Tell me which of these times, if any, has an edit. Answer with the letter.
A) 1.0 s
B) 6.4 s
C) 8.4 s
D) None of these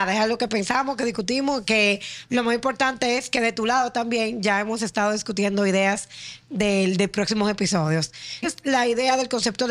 C